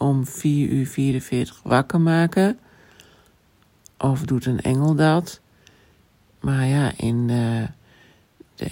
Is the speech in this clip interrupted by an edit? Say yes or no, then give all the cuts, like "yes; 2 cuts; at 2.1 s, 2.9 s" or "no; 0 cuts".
no; 0 cuts